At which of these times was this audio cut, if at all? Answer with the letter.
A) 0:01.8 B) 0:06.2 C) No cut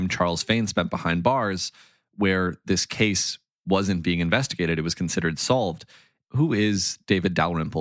B